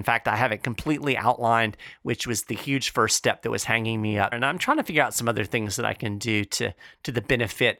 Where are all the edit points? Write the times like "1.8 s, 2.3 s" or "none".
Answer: 4.3 s